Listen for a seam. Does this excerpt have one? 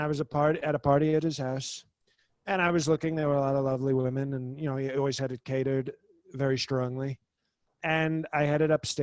no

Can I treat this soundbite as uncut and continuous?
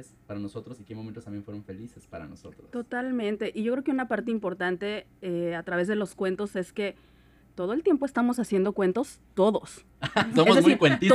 yes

